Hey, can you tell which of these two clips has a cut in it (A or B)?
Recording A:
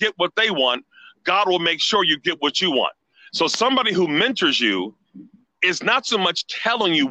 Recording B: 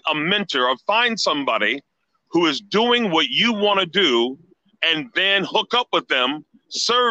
A